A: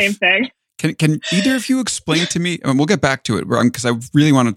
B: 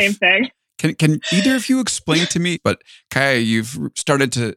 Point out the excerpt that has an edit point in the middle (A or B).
B